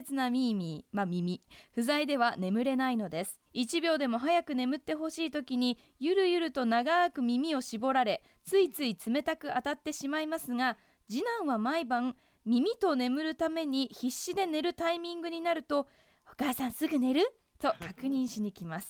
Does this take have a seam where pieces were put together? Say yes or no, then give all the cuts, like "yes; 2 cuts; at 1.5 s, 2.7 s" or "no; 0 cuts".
yes; 1 cut; at 3.5 s